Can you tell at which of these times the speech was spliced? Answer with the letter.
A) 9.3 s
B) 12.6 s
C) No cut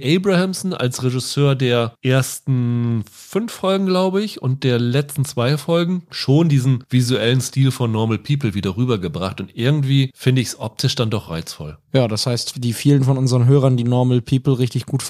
C